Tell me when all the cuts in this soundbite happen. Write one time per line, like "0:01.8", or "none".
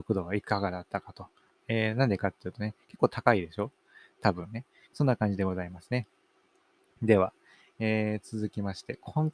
0:01.5
0:04.9